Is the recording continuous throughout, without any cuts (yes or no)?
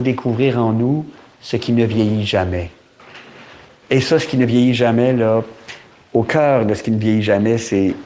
yes